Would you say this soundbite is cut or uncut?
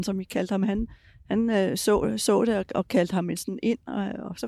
uncut